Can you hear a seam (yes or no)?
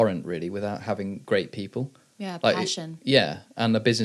no